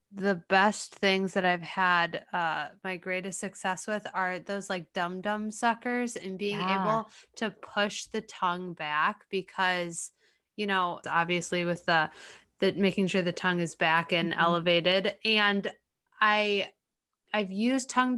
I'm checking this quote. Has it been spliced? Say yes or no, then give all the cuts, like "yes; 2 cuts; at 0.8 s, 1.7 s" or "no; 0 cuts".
yes; 1 cut; at 11.0 s